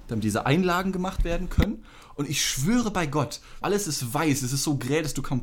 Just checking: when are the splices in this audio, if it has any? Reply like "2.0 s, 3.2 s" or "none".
3.6 s